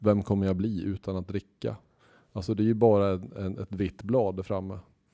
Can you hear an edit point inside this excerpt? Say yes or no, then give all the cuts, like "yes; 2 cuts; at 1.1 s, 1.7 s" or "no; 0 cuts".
no; 0 cuts